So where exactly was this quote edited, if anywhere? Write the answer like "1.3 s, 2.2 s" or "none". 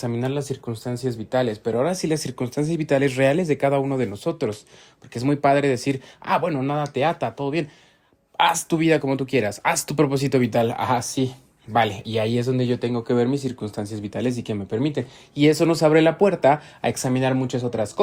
none